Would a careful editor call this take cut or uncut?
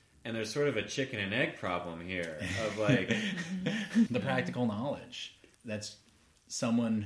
cut